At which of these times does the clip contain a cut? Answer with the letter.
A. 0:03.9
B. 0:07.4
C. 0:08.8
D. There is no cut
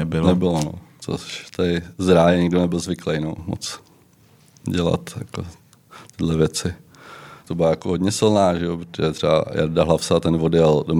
B